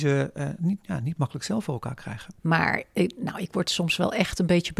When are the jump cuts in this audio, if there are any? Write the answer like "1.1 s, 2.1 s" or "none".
2.4 s